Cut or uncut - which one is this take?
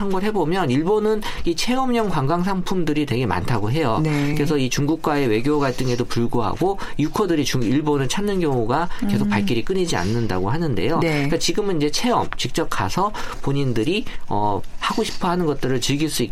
uncut